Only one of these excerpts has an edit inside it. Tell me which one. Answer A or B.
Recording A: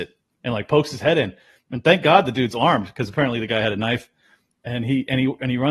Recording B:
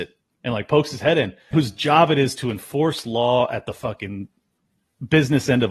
B